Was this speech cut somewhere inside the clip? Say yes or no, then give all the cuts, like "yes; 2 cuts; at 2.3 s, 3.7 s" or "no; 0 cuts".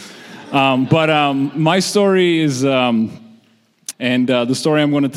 yes; 1 cut; at 3.9 s